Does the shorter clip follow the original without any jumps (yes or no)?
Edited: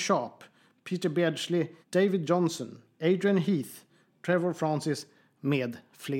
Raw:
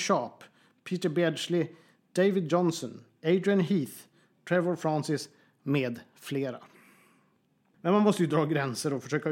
no